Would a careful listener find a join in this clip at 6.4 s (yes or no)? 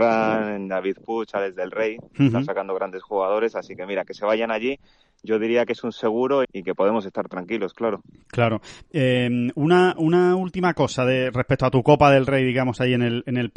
yes